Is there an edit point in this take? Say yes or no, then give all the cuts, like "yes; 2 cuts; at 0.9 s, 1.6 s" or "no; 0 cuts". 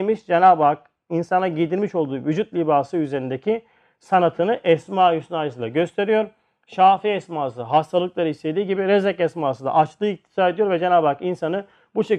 no; 0 cuts